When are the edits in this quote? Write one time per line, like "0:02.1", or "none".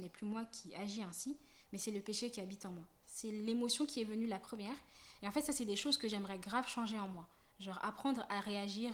0:03.0